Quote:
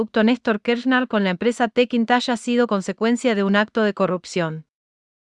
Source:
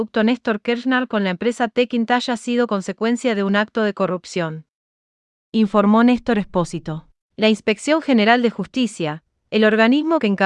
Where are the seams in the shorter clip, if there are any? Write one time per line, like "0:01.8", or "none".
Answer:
none